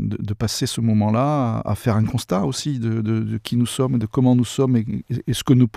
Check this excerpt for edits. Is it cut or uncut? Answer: uncut